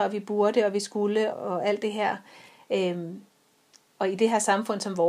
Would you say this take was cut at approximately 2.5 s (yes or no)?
no